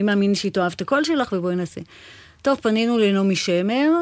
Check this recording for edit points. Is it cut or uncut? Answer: uncut